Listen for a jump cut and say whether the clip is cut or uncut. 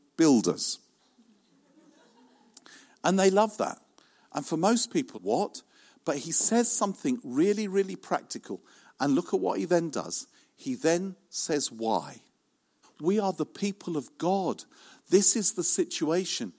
cut